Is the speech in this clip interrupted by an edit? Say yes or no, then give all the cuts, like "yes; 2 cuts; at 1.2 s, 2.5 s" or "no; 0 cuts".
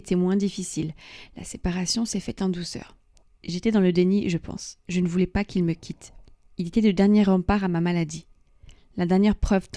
no; 0 cuts